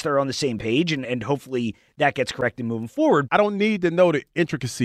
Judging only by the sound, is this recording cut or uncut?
cut